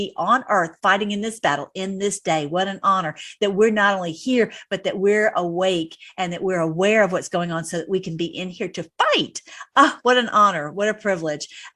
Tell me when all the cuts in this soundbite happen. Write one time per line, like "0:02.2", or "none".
none